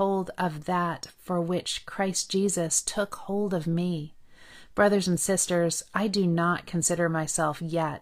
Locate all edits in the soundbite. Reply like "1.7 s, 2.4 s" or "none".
none